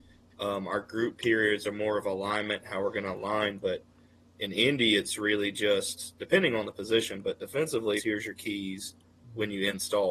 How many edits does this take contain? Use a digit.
1